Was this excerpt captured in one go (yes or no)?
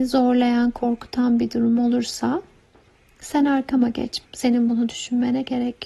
no